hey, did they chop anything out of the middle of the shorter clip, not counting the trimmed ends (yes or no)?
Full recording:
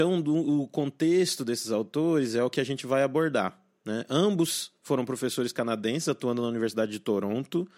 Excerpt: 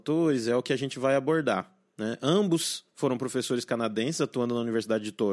no